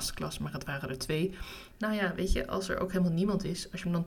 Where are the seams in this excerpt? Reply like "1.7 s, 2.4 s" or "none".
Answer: 1.7 s